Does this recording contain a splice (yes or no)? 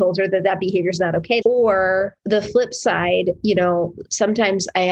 yes